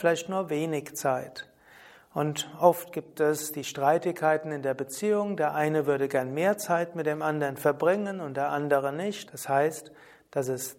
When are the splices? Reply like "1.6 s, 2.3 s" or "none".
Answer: 9.3 s